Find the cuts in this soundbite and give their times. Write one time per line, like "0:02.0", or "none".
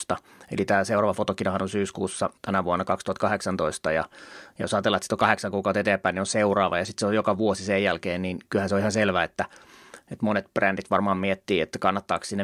0:02.4